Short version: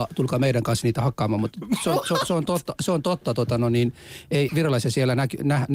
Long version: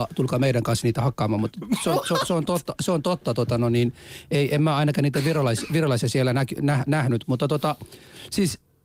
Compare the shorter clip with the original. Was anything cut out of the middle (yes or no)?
yes